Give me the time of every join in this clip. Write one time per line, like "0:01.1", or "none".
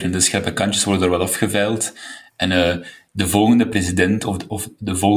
none